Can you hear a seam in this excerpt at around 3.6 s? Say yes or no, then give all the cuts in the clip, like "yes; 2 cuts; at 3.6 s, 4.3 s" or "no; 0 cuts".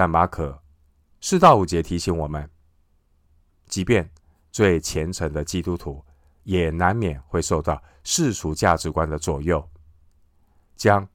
no; 1 cut; at 1.1 s